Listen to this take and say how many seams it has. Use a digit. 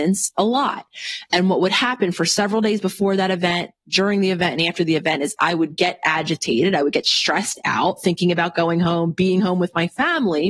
0